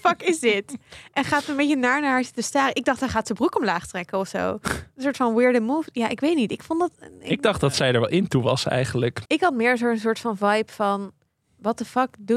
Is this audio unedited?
no; 1 cut; at 9.2 s

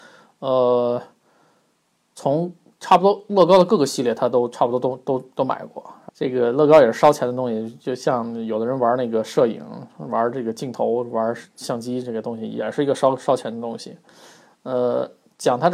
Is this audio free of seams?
no; 1 cut; at 6.1 s

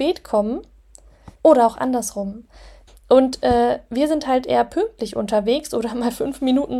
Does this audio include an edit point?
yes; 2 cuts; at 1.4 s, 2.9 s

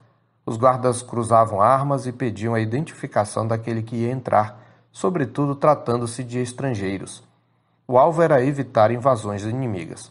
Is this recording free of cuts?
yes; 0 cuts

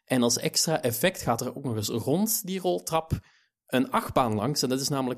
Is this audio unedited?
yes; 0 cuts

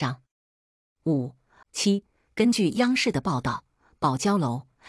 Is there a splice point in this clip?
yes; 1 cut; at 1.6 s

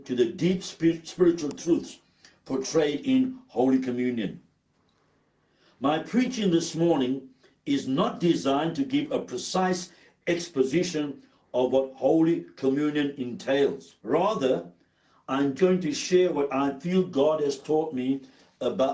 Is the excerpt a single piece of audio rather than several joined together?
no; 2 cuts; at 14.0 s, 15.6 s

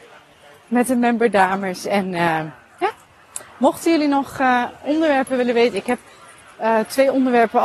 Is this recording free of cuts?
yes; 0 cuts

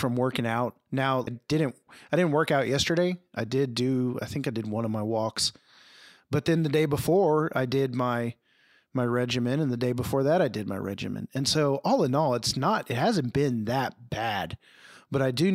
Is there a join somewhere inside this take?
yes; 1 cut; at 1.3 s

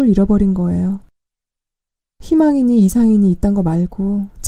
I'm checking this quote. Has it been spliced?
no; 0 cuts

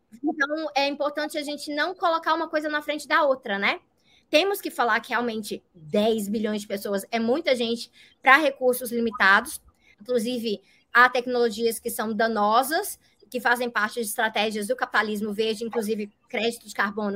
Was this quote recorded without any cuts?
no; 2 cuts; at 4.2 s, 9.9 s

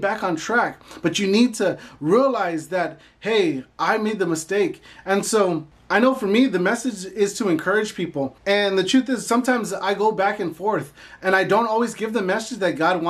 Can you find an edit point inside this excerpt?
yes; 1 cut; at 8.4 s

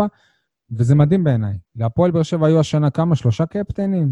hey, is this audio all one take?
no; 1 cut; at 1.6 s

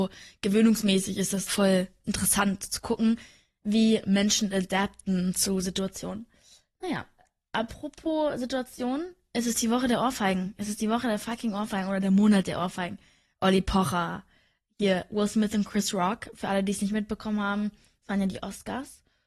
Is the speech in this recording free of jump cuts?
no; 1 cut; at 1.5 s

